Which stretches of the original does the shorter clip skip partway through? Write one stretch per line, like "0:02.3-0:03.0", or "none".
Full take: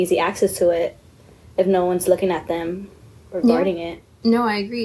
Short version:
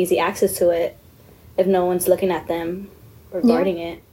none